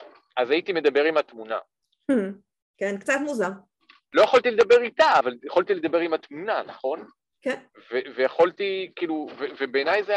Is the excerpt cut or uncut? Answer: uncut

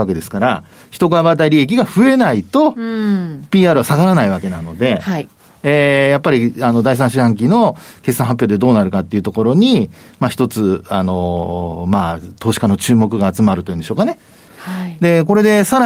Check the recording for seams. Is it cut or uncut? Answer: cut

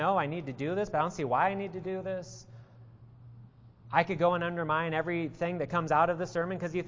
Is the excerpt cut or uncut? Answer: uncut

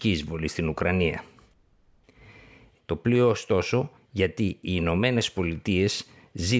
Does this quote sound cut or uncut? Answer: cut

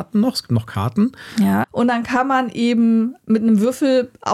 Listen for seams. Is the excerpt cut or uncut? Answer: cut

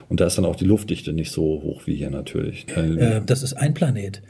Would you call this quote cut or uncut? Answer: cut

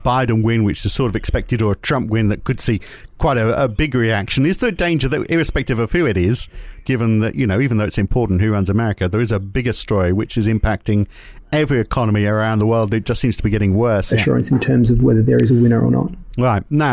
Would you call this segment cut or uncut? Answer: cut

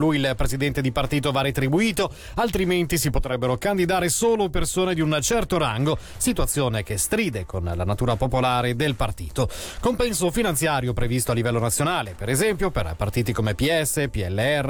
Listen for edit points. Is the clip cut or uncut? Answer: uncut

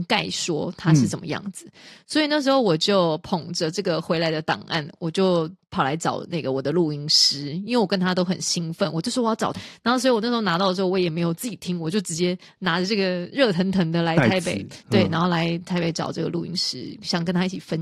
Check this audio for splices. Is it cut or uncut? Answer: cut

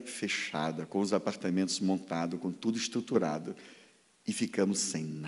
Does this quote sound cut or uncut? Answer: uncut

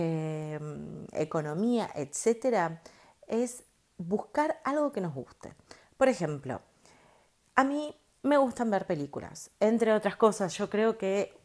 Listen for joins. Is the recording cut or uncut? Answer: uncut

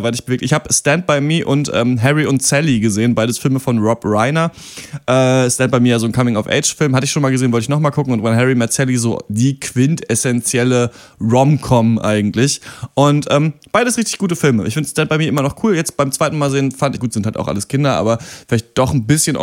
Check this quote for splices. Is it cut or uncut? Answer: cut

